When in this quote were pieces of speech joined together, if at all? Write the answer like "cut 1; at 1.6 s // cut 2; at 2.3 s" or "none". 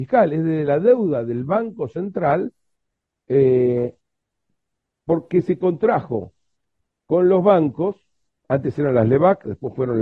none

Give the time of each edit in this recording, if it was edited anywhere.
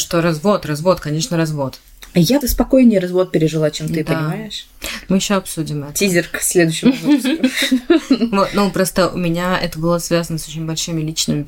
cut 1; at 2.4 s

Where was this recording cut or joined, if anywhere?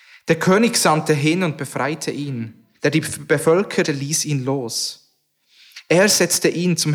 cut 1; at 2.7 s // cut 2; at 3.8 s

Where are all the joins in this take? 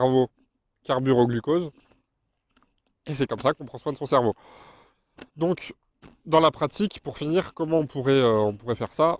none

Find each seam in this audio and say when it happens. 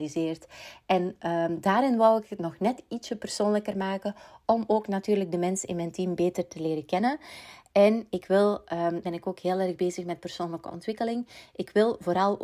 cut 1; at 9.0 s

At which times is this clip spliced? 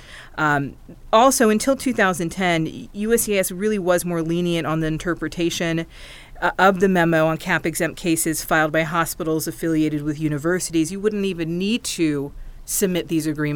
none

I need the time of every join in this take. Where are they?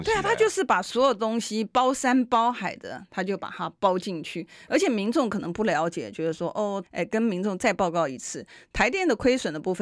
cut 1; at 6.8 s

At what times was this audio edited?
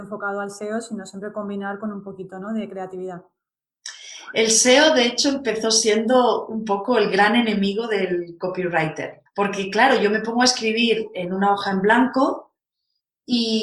cut 1; at 9.3 s

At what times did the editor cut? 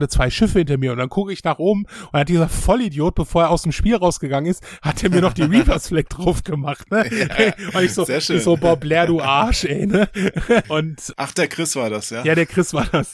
cut 1; at 10.6 s

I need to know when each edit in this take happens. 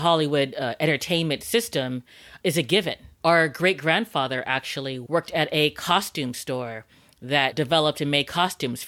none

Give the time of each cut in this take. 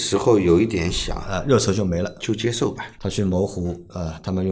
cut 1; at 3.0 s

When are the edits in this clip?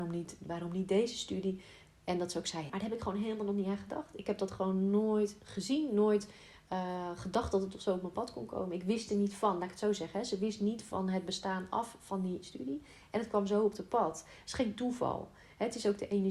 cut 1; at 2.7 s

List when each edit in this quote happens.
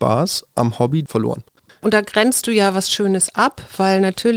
none

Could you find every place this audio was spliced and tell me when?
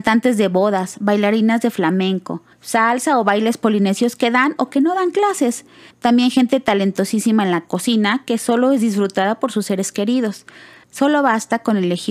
cut 1; at 2.5 s // cut 2; at 5.9 s // cut 3; at 10.8 s

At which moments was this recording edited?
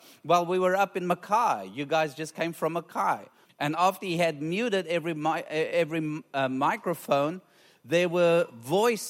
cut 1; at 3.4 s

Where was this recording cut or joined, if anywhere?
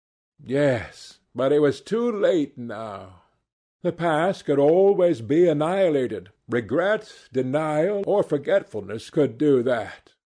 cut 1; at 1.2 s

